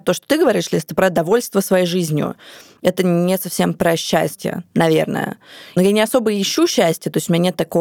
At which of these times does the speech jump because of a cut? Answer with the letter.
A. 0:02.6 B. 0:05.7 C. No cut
C